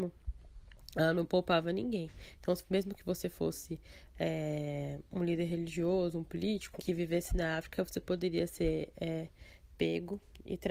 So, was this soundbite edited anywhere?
yes; 1 cut; at 6.8 s

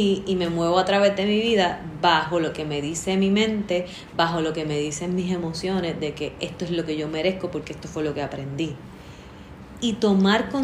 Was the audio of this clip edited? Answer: no; 0 cuts

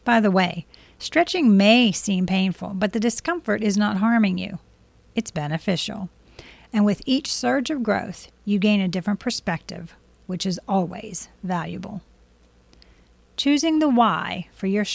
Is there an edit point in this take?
no; 0 cuts

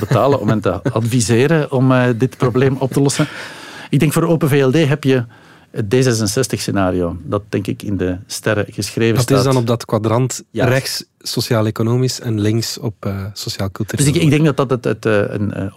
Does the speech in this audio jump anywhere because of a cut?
no; 0 cuts

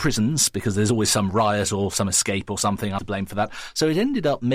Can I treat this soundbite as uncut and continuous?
no; 1 cut; at 3.0 s

